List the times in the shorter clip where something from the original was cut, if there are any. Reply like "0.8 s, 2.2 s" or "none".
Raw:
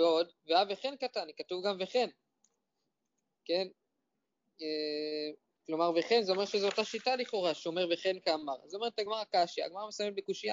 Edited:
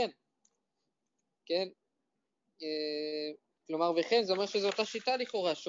none